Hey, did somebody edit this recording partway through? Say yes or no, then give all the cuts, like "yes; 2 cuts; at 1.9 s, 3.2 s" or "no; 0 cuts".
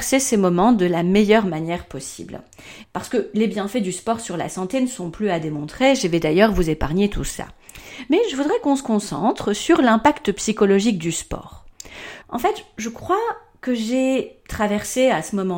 yes; 2 cuts; at 2.8 s, 12.2 s